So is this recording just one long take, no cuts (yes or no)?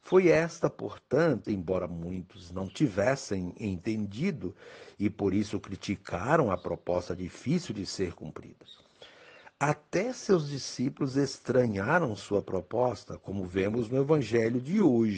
no